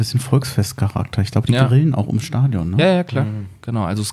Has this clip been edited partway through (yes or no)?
no